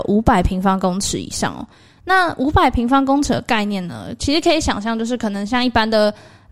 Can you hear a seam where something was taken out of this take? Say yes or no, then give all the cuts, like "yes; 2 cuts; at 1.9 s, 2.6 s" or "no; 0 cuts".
no; 0 cuts